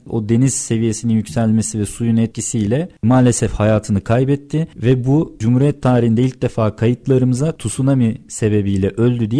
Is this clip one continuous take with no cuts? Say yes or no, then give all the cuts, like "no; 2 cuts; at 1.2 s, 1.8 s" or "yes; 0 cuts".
yes; 0 cuts